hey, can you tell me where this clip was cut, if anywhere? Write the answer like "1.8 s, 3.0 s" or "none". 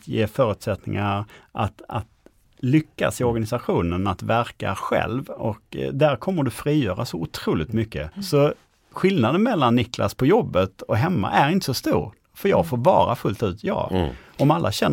8.1 s